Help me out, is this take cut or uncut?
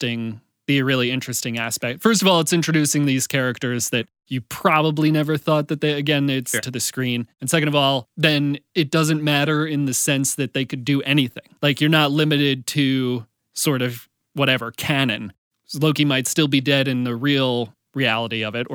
cut